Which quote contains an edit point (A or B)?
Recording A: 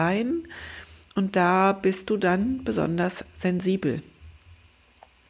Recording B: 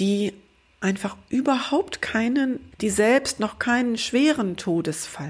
B